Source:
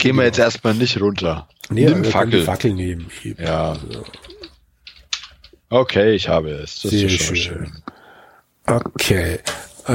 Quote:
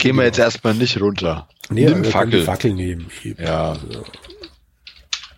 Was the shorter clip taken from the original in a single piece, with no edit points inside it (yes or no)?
yes